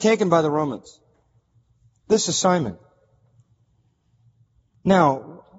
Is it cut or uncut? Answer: uncut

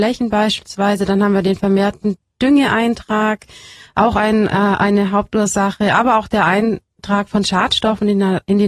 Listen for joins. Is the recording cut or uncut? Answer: uncut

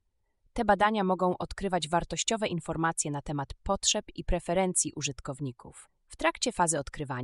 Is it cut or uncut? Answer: cut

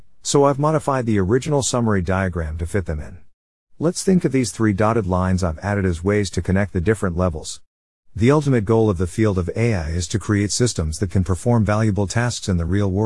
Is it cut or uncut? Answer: uncut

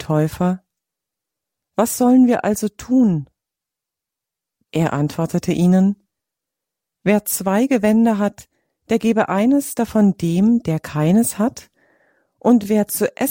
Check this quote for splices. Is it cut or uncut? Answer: uncut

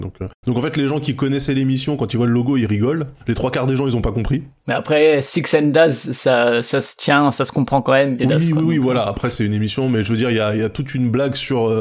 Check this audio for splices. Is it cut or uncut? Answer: cut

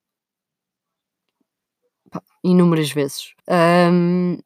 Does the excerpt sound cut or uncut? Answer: cut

